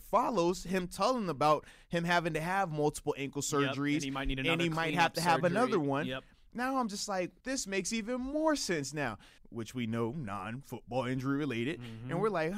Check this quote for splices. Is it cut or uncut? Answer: cut